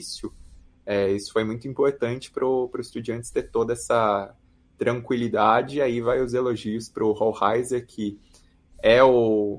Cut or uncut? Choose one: uncut